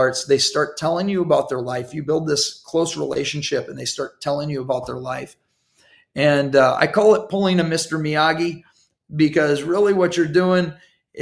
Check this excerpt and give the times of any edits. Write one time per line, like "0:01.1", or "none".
none